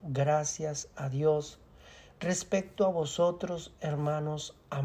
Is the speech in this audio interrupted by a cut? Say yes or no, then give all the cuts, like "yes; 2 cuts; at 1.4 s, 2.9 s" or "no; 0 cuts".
no; 0 cuts